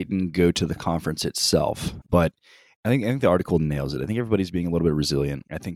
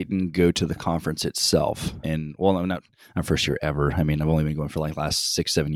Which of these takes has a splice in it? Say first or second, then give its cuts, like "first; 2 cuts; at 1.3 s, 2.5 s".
first; 1 cut; at 2.0 s